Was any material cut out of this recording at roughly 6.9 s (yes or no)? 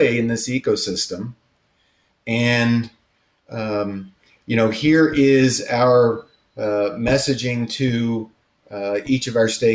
no